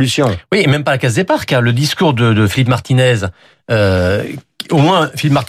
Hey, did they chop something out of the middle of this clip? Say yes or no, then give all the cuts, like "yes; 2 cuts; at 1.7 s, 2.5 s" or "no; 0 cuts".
no; 0 cuts